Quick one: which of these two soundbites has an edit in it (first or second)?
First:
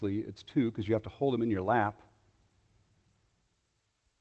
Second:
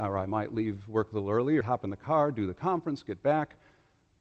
second